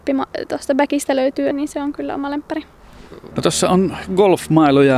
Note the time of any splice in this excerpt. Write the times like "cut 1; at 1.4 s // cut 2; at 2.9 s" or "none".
cut 1; at 1.5 s // cut 2; at 3.3 s